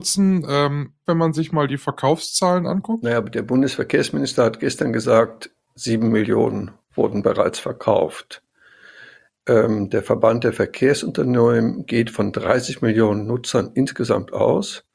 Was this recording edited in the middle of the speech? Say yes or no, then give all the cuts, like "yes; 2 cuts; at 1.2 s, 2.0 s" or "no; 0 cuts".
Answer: yes; 1 cut; at 1.1 s